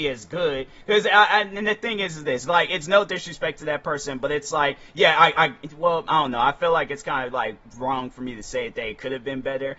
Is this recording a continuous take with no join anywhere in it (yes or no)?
yes